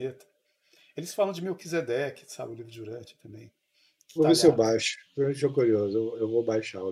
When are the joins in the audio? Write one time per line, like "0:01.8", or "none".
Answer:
0:04.2